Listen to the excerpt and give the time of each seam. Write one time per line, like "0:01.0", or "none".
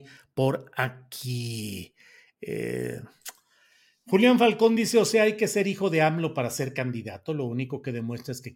none